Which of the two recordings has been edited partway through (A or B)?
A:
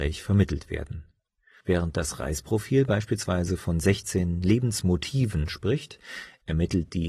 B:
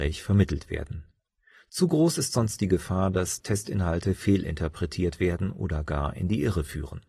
A